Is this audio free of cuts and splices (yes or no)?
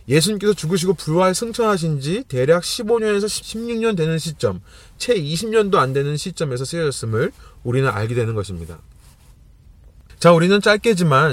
yes